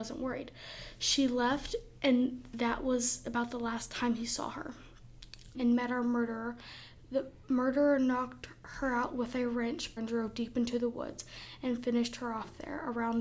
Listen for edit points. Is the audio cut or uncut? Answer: cut